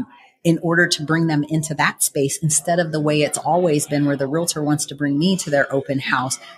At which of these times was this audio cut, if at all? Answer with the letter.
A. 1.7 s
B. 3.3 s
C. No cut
C